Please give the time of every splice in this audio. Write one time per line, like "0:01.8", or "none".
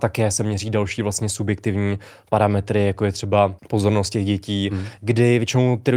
0:03.6
0:05.0